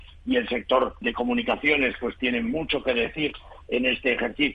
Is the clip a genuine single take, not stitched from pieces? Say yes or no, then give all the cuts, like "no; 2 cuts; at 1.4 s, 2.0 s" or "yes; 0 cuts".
no; 1 cut; at 1.0 s